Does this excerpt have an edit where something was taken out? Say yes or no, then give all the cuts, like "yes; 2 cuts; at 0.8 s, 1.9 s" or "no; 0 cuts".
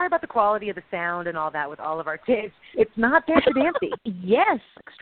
yes; 2 cuts; at 2.7 s, 4.0 s